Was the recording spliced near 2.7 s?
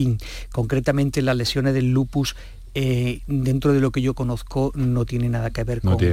no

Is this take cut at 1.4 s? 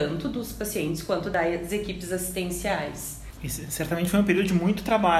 no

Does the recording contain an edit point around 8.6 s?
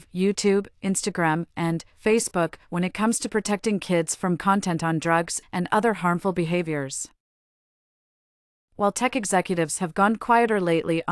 yes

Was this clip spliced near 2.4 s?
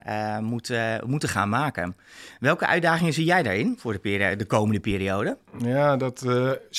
no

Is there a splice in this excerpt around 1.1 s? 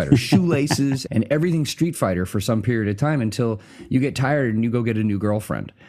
yes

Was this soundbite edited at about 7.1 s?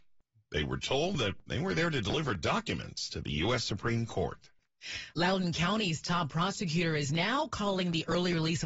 no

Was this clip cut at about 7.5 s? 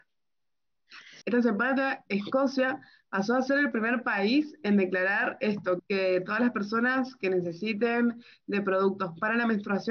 no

